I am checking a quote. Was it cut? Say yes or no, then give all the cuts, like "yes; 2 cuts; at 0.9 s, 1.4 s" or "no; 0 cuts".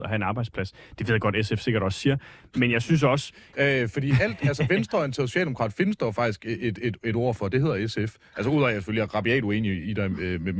yes; 1 cut; at 3.5 s